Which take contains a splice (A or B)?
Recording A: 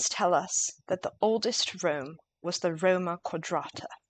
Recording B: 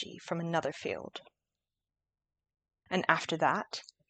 B